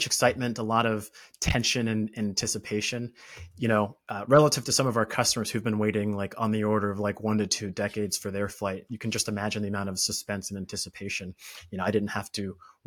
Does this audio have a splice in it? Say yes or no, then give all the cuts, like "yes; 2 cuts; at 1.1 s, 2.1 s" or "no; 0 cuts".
no; 0 cuts